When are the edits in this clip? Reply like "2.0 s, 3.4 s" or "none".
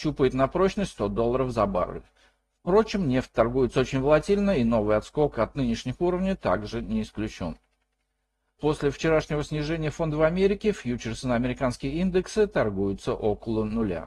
8.6 s